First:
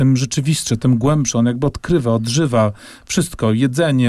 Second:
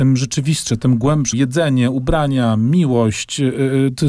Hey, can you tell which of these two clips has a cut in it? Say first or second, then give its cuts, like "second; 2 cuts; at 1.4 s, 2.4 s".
second; 1 cut; at 1.3 s